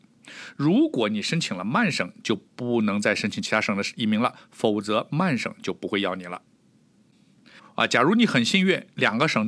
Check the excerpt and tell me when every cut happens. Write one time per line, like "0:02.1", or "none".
0:07.6